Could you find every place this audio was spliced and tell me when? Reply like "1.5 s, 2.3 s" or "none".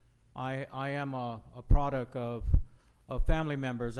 none